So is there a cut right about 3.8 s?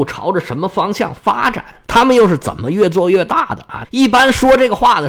yes; 1 cut; at 3.8 s

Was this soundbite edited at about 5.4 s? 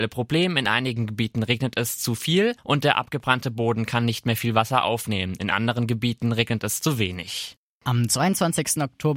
no; 0 cuts

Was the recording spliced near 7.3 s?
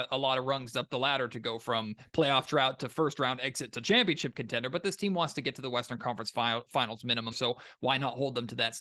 yes; 1 cut; at 7.3 s

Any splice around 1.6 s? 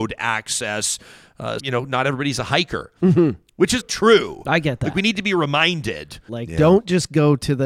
yes; 3 cuts; at 1.6 s, 3.8 s, 6.3 s

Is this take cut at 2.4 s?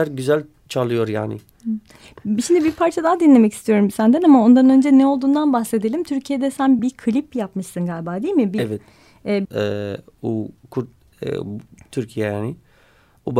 no; 2 cuts; at 6.8 s, 9.4 s

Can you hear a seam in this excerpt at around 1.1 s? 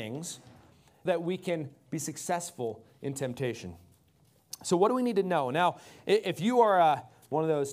yes; 1 cut; at 1.1 s

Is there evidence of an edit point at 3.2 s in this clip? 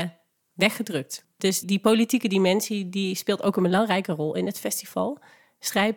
no; 1 cut; at 1.6 s

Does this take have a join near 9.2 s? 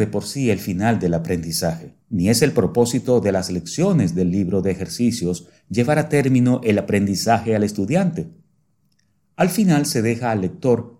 no; 1 cut; at 2.0 s

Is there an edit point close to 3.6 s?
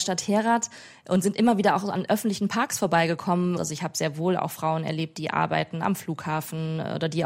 yes; 1 cut; at 3.6 s

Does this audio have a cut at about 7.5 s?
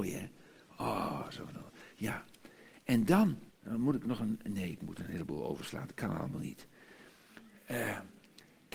no; 1 cut; at 3.5 s

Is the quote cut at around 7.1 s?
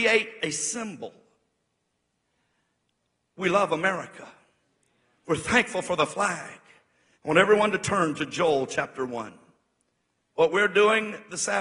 yes; 2 cuts; at 7.1 s, 10.2 s

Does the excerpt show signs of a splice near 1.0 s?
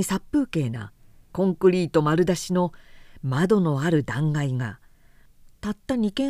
no; 0 cuts

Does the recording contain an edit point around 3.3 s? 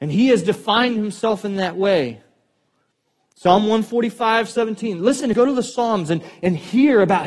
no; 1 cut; at 5.3 s

